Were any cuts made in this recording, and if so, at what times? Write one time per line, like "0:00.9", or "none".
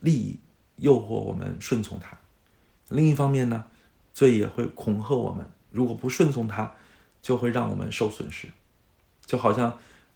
none